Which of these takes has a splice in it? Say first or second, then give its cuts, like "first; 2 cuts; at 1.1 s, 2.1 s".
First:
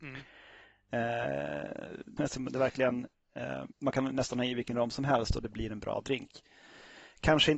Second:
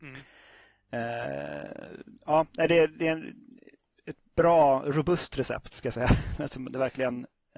first; 2 cuts; at 2.2 s, 3.7 s